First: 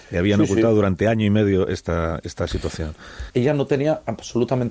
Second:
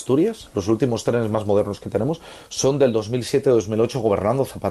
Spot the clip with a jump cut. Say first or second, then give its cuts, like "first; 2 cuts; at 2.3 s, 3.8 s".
first; 1 cut; at 3.3 s